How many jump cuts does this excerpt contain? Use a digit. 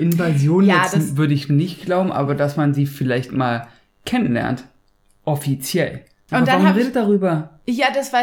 1